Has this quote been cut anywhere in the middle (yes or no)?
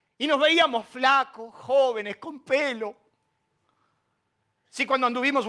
no